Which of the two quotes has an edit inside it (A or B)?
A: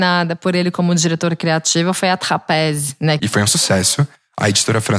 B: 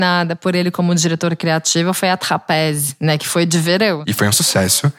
A